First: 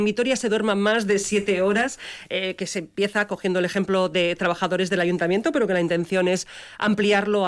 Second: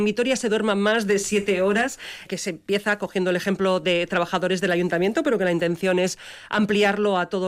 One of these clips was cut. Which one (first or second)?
second